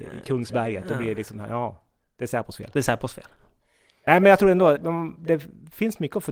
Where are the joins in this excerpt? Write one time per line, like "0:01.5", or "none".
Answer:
0:04.8